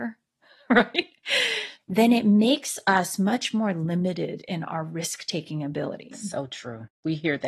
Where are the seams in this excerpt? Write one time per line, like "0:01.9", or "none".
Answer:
0:01.8